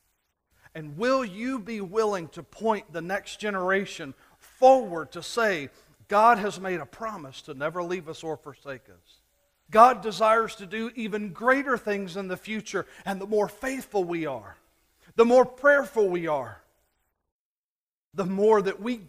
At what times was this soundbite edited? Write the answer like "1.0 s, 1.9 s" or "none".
9.7 s